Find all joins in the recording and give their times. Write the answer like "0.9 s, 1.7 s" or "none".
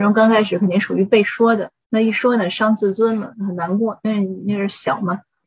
none